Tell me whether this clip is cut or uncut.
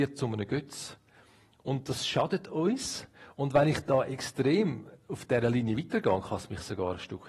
uncut